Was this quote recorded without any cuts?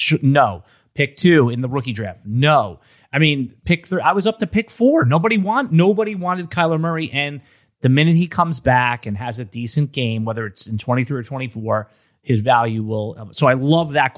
yes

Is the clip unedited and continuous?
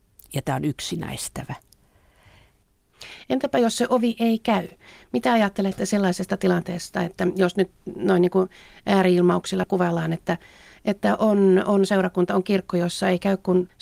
yes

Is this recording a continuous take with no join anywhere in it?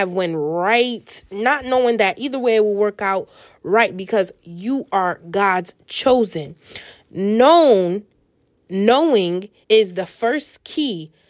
no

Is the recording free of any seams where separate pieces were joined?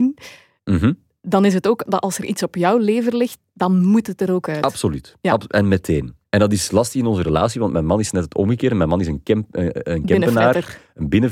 yes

